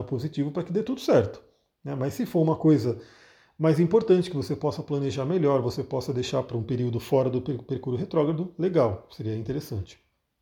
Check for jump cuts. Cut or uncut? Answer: uncut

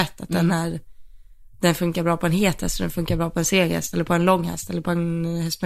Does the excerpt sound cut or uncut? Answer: uncut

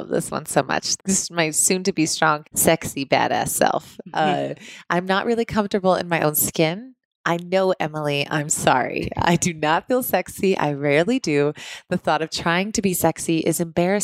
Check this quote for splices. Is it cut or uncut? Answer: cut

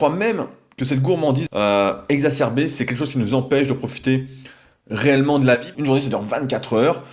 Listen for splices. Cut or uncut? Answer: cut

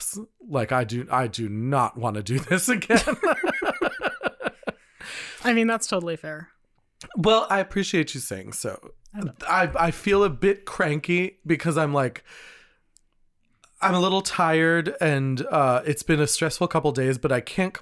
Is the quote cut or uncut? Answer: uncut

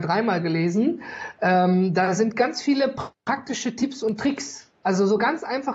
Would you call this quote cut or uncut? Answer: uncut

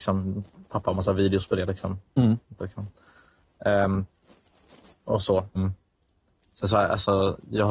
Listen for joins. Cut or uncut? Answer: cut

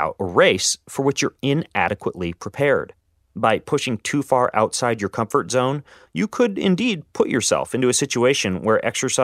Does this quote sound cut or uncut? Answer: uncut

